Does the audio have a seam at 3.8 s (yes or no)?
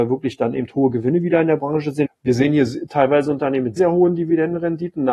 yes